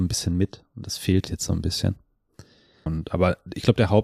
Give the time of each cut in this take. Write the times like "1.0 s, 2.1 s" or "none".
1.2 s, 2.9 s